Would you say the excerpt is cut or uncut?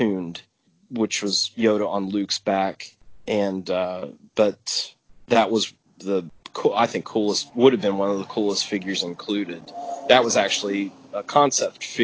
cut